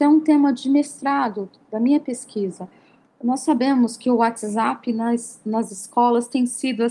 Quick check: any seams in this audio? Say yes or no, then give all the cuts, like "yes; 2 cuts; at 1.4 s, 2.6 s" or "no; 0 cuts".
no; 0 cuts